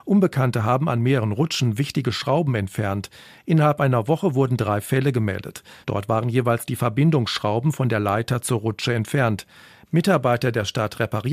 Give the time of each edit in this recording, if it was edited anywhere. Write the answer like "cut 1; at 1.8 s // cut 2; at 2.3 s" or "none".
cut 1; at 5.8 s